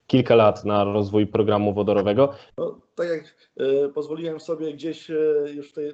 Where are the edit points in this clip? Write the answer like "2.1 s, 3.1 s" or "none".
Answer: 2.5 s